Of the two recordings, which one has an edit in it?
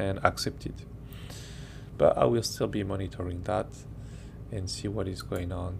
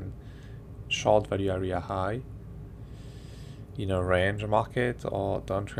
first; 1 cut; at 1.9 s

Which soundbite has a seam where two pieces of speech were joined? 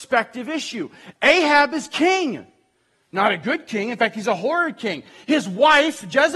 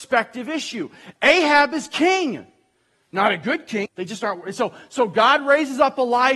second; 1 cut; at 3.9 s

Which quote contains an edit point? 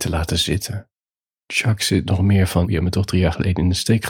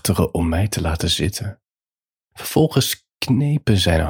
first; 2 cuts; at 1.4 s, 2.6 s

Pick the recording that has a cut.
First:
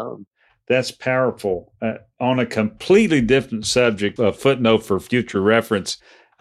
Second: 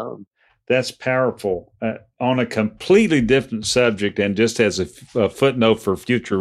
first; 1 cut; at 4.2 s

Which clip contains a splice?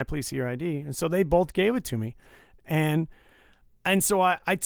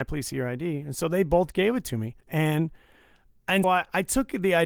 second; 2 cuts; at 2.2 s, 3.6 s

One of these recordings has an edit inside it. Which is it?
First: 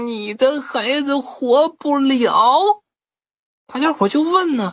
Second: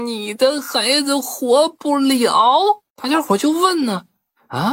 second; 1 cut; at 2.9 s

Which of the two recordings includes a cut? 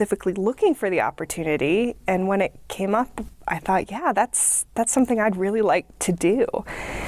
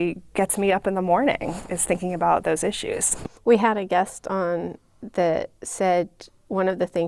second; 2 cuts; at 3.3 s, 5.6 s

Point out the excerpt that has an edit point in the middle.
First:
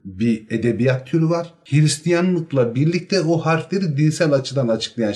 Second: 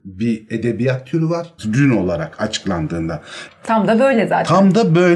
second; 2 cuts; at 1.6 s, 3.5 s

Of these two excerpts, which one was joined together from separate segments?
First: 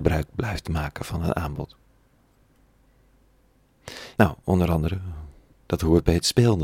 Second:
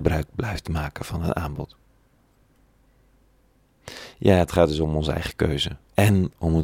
first; 2 cuts; at 4.2 s, 5.5 s

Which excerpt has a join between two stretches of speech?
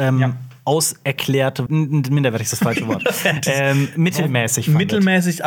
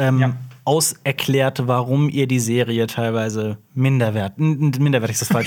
first; 1 cut; at 1.7 s

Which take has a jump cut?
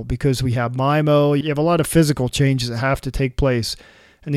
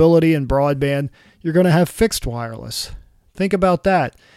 first; 1 cut; at 1.4 s

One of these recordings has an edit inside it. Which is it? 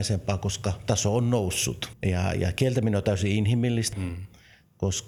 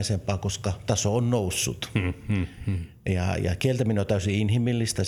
first; 2 cuts; at 1.9 s, 3.9 s

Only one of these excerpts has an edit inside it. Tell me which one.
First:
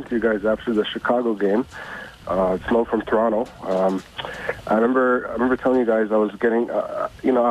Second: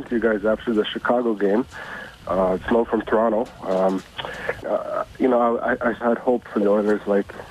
second; 2 cuts; at 4.6 s, 6.0 s

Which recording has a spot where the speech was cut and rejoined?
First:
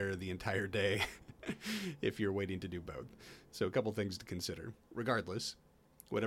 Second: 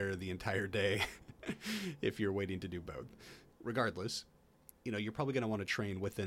second; 2 cuts; at 3.5 s, 4.7 s

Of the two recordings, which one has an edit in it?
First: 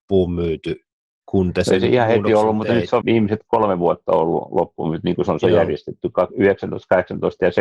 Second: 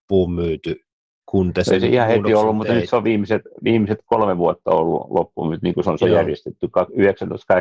first; 1 cut; at 3.0 s

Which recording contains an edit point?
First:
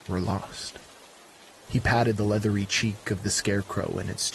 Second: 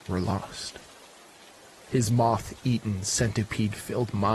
first; 1 cut; at 1.7 s

